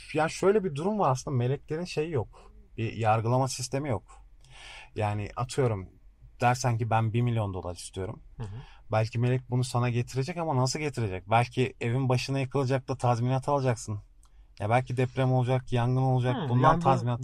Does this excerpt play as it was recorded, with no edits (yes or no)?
yes